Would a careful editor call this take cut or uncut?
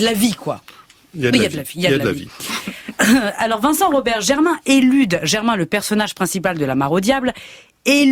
uncut